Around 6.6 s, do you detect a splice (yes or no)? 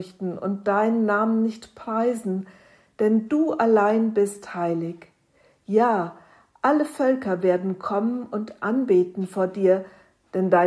no